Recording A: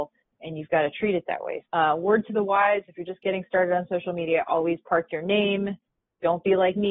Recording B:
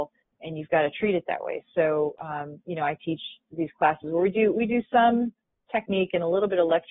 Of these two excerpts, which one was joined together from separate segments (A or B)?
A